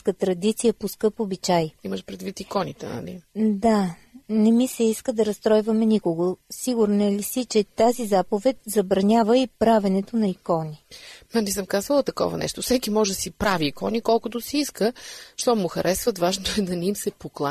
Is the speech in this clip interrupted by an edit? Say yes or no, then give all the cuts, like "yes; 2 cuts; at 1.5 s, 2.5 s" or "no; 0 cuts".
no; 0 cuts